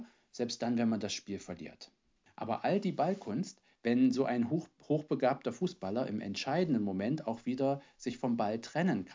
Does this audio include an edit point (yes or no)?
yes